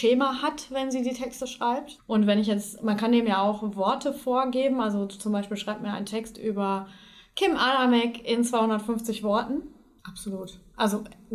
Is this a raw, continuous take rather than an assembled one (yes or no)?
no